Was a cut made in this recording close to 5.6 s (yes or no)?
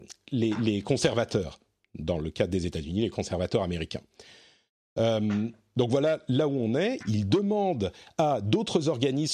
no